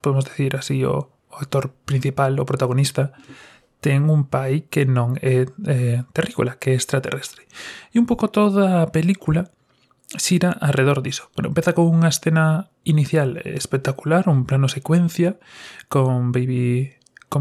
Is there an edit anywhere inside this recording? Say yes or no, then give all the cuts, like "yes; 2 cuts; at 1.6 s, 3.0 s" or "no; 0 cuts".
no; 0 cuts